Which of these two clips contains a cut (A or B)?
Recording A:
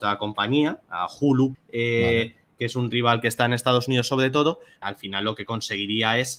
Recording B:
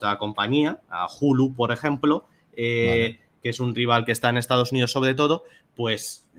A